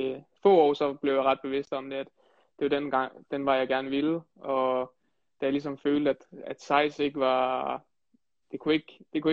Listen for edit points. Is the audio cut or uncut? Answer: uncut